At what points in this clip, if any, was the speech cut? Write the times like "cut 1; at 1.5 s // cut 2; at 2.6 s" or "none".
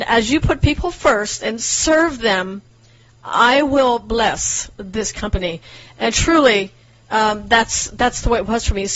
none